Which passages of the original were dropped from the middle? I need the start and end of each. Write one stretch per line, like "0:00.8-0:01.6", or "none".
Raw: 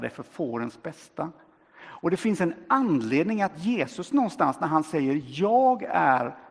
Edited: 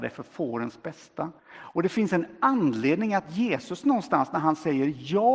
0:01.4-0:01.7